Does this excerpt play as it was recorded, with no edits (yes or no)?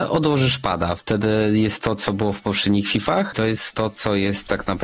no